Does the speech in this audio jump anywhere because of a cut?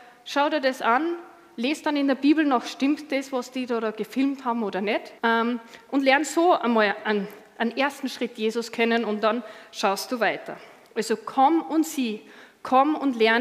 yes; 1 cut; at 5.2 s

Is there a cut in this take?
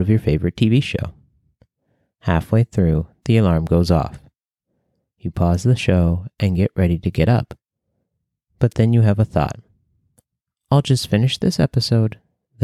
no; 0 cuts

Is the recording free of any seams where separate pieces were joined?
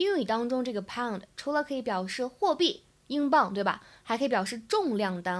yes; 0 cuts

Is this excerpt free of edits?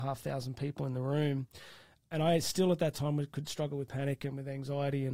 yes; 0 cuts

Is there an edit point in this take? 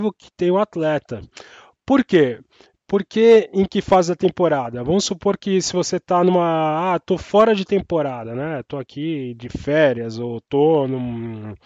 no; 0 cuts

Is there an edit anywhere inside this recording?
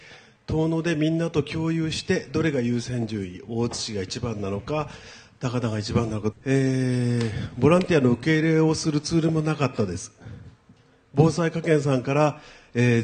yes; 1 cut; at 6.3 s

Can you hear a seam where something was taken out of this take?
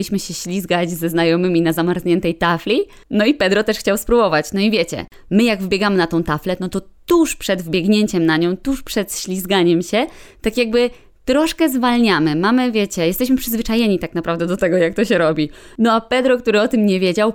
no; 0 cuts

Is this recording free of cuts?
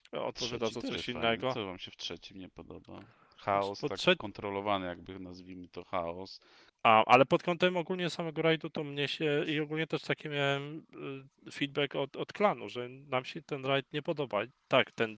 no; 1 cut; at 6.7 s

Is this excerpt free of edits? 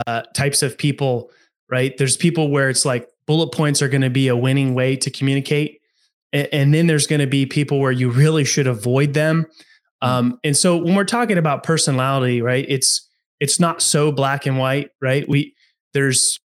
yes; 0 cuts

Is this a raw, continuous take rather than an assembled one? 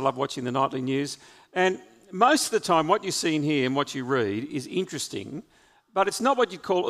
yes; 0 cuts

